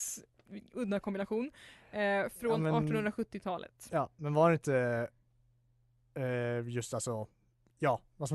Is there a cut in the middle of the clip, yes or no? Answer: no